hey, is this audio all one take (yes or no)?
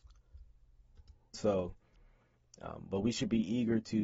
no